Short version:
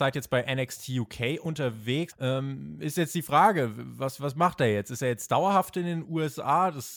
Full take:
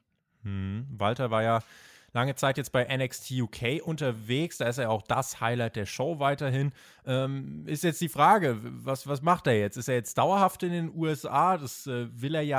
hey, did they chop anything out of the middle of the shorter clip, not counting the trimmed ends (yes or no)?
yes